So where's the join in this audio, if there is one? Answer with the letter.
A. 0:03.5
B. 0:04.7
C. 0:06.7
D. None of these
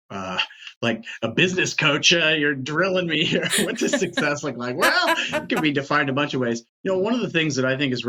D